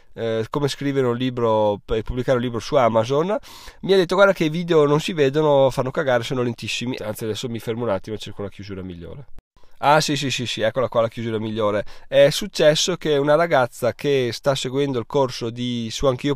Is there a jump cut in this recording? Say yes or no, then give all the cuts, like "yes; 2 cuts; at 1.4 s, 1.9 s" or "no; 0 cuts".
yes; 1 cut; at 7.0 s